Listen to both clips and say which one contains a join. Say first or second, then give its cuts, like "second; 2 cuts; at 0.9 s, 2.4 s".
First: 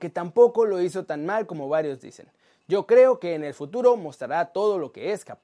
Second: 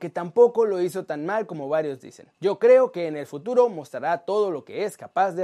second; 1 cut; at 2.3 s